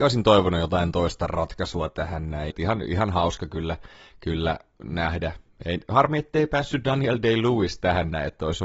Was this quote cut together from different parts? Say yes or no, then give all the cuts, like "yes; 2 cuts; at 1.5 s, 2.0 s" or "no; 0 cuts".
yes; 1 cut; at 2.5 s